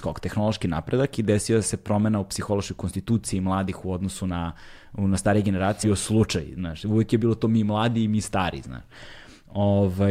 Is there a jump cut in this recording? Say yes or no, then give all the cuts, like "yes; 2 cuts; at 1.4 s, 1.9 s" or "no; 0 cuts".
yes; 1 cut; at 5.8 s